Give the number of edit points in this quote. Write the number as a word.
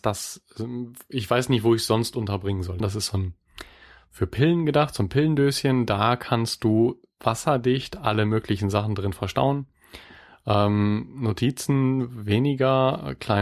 one